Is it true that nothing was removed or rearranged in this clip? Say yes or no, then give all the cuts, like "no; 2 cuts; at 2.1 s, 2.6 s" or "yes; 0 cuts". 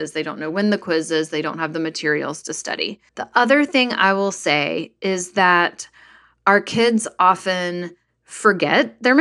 no; 1 cut; at 3.1 s